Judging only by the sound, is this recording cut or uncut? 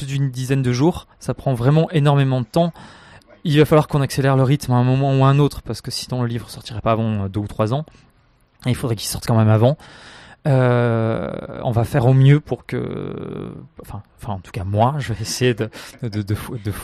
cut